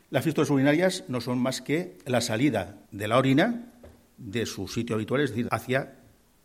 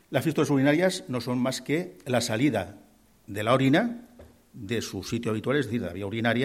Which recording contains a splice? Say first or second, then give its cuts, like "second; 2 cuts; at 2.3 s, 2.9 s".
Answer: first; 2 cuts; at 2.8 s, 5.5 s